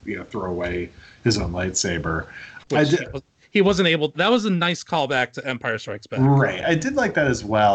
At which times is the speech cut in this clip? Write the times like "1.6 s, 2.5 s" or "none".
2.6 s, 6.6 s